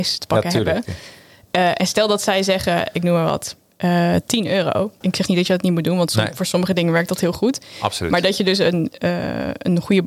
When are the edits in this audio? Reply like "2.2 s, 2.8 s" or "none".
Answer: 5.0 s